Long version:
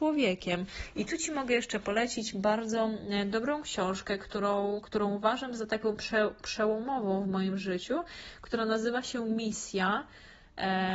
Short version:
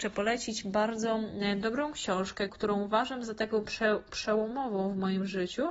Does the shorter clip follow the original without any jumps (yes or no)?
no